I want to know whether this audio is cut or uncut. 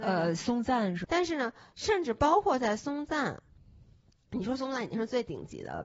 cut